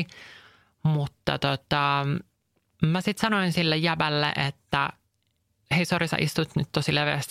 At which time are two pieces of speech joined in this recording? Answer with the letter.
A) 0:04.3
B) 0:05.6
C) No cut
C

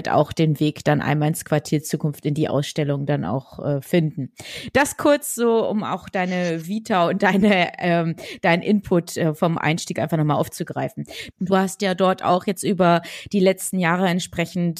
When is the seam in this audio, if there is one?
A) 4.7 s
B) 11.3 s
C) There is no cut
B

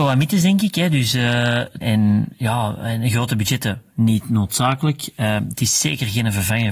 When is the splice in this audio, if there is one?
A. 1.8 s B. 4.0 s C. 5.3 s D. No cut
A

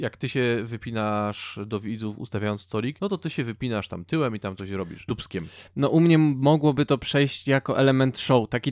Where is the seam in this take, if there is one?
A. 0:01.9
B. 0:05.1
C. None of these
B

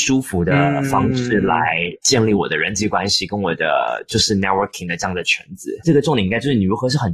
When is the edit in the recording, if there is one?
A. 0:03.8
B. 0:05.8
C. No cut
B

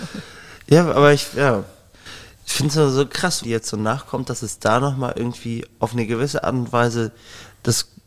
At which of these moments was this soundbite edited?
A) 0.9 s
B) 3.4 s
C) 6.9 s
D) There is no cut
B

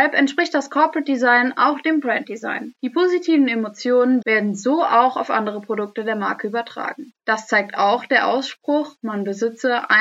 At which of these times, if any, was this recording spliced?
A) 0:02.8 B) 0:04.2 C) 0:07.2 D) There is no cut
B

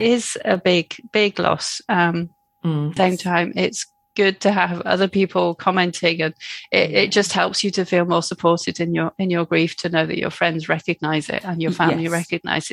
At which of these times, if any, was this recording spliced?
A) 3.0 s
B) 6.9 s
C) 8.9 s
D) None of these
A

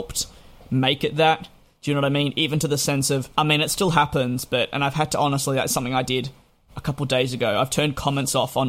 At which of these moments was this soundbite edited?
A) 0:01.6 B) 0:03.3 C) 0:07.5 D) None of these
B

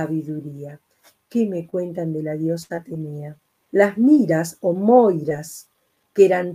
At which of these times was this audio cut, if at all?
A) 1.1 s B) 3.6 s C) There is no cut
B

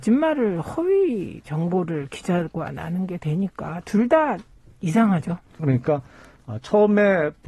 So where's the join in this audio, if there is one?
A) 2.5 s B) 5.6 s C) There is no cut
B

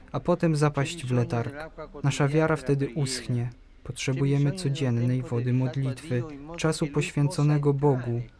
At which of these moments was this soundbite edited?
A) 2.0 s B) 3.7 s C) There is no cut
C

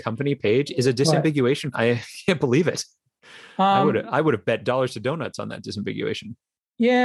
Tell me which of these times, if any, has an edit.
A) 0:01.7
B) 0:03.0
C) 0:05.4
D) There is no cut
A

